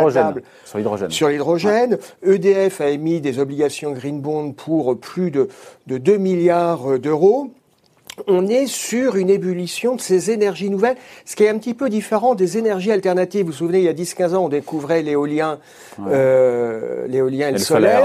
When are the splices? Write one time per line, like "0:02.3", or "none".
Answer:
none